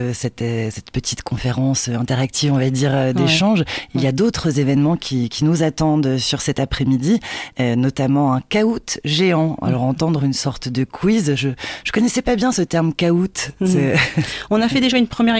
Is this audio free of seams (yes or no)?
yes